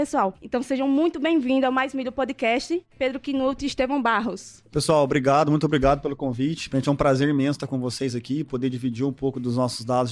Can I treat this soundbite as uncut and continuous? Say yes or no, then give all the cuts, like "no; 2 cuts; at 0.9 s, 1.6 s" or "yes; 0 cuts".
yes; 0 cuts